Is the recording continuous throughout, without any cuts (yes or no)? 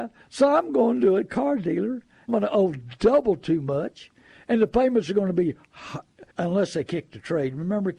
no